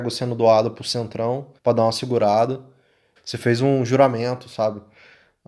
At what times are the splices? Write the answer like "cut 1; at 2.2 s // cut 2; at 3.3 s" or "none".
cut 1; at 1.6 s // cut 2; at 3.2 s

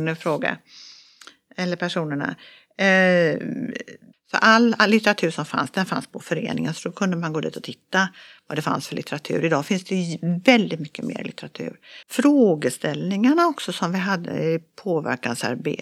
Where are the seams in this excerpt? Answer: cut 1; at 4.1 s // cut 2; at 12.0 s

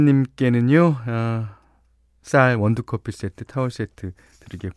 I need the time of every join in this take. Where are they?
none

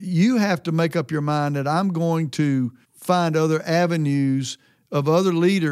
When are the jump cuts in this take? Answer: cut 1; at 2.8 s

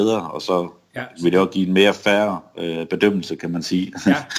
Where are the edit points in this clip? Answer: none

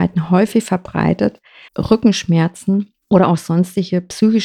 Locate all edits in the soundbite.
cut 1; at 1.7 s // cut 2; at 3.0 s

